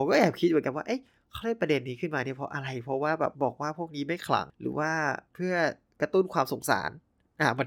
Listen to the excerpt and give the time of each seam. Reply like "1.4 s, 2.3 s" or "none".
3.3 s, 5.3 s